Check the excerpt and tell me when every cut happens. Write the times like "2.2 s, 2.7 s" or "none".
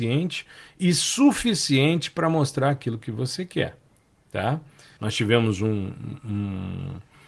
5.0 s